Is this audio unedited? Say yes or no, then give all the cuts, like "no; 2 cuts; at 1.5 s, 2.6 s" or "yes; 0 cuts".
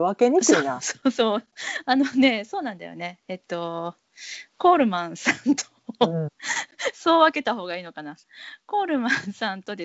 no; 1 cut; at 6.4 s